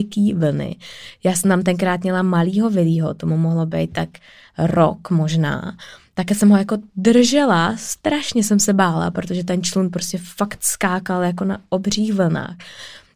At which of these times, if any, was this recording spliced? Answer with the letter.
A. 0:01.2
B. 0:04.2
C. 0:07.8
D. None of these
D